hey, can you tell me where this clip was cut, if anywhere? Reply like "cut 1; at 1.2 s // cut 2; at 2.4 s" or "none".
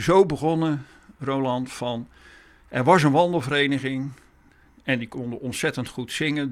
none

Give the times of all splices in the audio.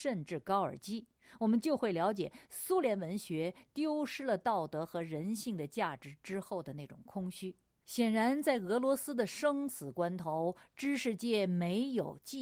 cut 1; at 7.8 s

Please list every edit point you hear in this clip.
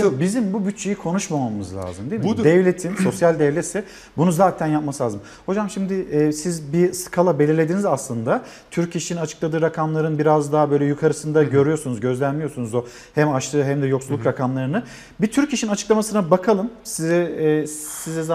none

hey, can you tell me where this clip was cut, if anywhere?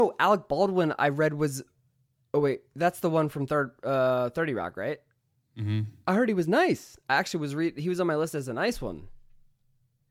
none

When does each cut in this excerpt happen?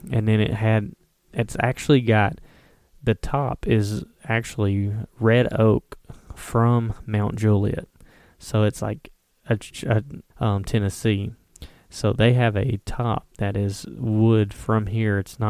cut 1; at 10.3 s

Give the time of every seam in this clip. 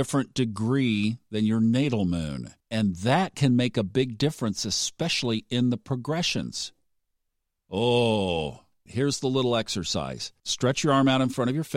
cut 1; at 2.6 s // cut 2; at 8.9 s // cut 3; at 10.4 s

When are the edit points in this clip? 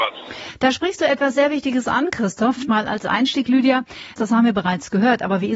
cut 1; at 2.7 s // cut 2; at 4.2 s

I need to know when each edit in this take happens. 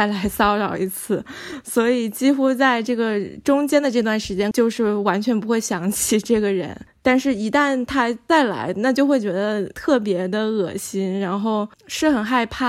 cut 1; at 4.5 s

